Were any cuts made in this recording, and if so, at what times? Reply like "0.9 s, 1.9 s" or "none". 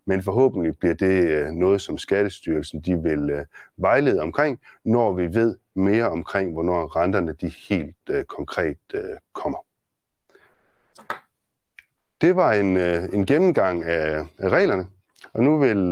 none